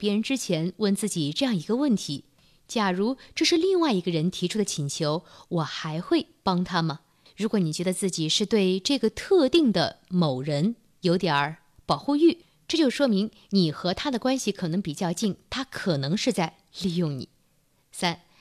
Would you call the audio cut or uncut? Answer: uncut